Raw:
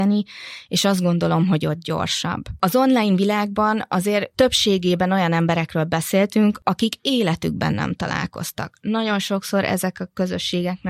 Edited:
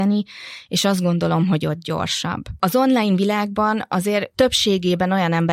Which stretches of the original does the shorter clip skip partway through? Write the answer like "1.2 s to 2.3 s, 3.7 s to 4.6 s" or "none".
none